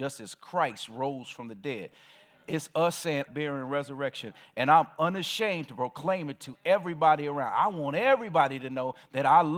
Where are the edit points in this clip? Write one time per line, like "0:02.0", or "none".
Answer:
0:03.3